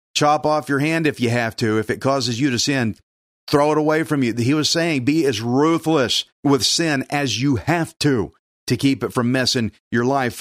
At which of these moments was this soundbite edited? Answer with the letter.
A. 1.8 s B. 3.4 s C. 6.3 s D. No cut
C